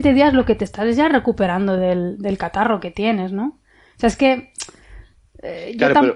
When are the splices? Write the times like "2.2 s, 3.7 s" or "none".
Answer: none